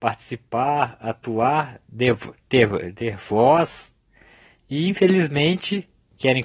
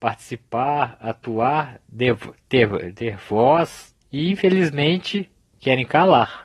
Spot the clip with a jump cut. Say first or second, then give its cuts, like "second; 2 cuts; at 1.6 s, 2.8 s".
second; 1 cut; at 4.0 s